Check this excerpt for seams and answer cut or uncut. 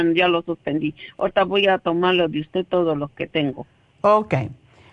uncut